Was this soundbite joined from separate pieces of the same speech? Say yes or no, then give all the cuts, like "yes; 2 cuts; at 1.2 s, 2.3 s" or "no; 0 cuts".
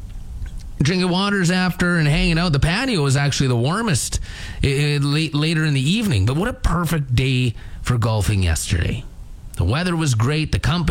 no; 0 cuts